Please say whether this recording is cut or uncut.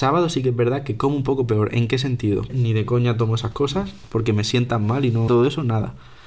cut